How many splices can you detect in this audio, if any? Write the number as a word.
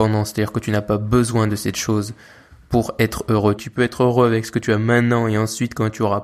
one